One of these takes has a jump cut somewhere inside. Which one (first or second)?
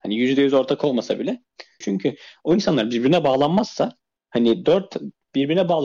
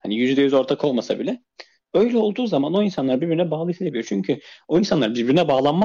first